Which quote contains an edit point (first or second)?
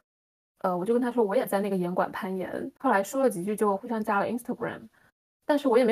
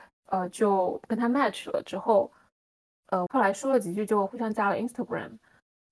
second